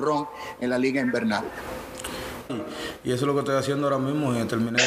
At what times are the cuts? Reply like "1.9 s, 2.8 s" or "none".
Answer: 2.5 s